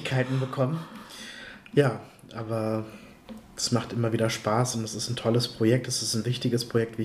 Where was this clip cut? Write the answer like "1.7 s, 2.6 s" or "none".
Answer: none